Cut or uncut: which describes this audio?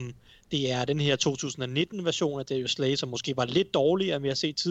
uncut